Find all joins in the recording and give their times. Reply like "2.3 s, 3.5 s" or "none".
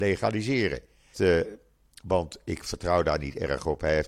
1.1 s